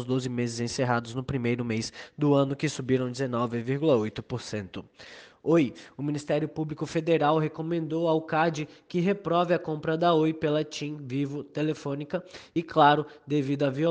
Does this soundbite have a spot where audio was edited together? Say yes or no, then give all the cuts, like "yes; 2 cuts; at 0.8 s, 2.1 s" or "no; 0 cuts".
no; 0 cuts